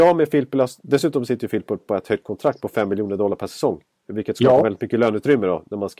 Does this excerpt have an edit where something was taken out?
no; 0 cuts

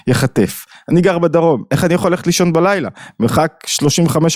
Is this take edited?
no; 0 cuts

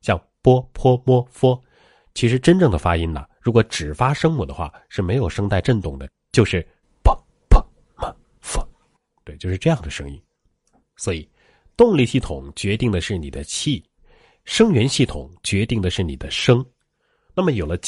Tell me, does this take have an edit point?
no; 0 cuts

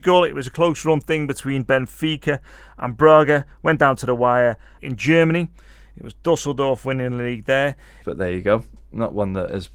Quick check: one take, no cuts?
no; 2 cuts; at 4.8 s, 8.0 s

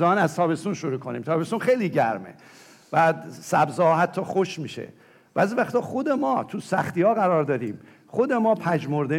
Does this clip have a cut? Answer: no; 0 cuts

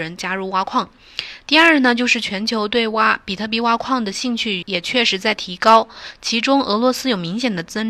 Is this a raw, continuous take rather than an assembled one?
no; 1 cut; at 4.6 s

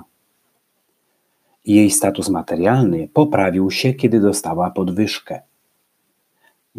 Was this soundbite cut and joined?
no; 0 cuts

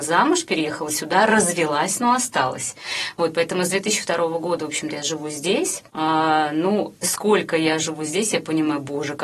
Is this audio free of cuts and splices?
no; 2 cuts; at 5.9 s, 7.0 s

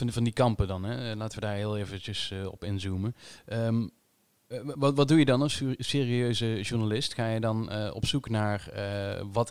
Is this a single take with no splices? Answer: yes; 0 cuts

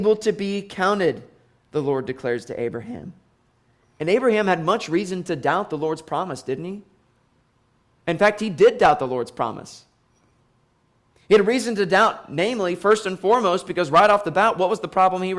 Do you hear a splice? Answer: no; 0 cuts

